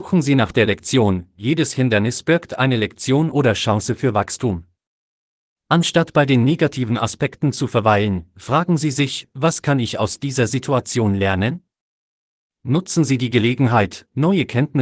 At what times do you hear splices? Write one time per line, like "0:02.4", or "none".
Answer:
none